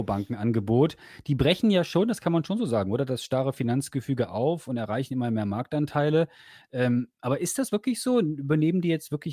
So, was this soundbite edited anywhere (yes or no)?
no